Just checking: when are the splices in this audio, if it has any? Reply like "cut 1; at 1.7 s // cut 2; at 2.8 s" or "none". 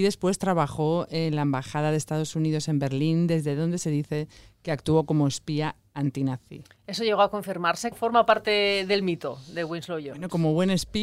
cut 1; at 7.9 s